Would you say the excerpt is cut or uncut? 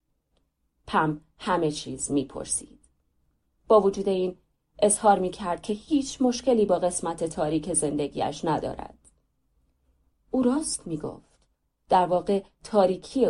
uncut